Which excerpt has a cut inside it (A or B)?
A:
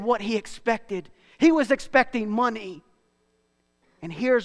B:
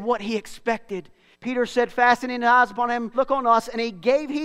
B